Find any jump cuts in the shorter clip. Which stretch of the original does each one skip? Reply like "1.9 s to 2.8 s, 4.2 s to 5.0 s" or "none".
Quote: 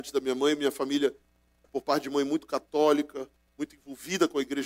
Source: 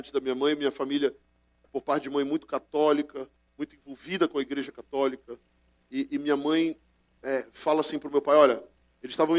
none

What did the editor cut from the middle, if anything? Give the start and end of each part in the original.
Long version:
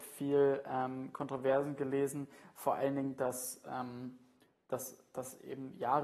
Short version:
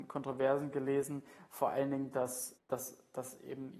3.6 s to 4.6 s

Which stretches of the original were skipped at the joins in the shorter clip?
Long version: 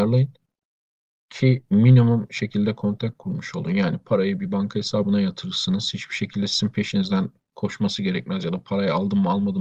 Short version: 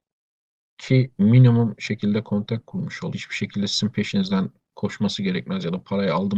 3.6 s to 5.9 s

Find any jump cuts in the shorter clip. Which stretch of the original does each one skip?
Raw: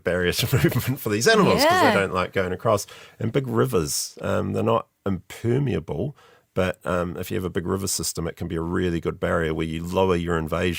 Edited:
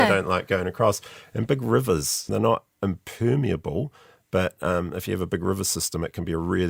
4.1 s to 4.5 s

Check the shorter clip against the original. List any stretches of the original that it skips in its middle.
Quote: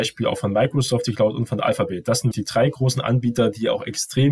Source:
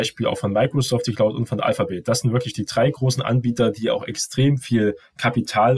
2.3 s to 2.5 s

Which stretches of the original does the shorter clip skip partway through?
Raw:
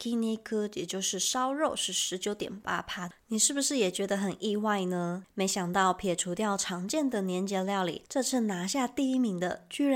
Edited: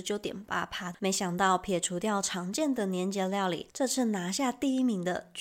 3.1 s to 5.3 s

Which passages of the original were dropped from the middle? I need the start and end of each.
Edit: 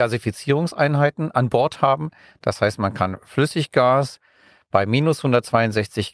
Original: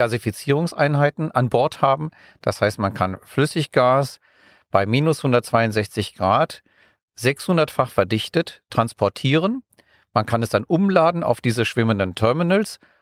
none

